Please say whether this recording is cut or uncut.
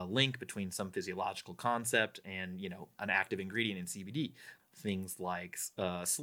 cut